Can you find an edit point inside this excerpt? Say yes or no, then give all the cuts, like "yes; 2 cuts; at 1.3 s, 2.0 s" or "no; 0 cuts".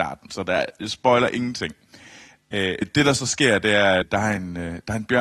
yes; 2 cuts; at 2.8 s, 4.0 s